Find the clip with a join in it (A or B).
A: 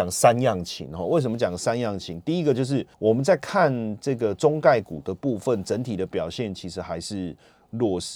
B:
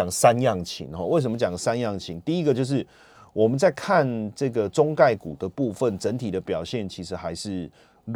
A